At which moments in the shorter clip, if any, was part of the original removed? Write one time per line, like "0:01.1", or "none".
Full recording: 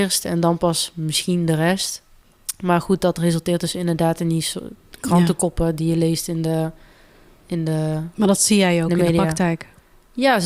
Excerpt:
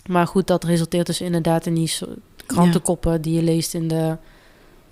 none